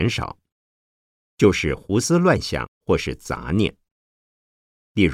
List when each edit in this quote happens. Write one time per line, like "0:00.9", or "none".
0:01.2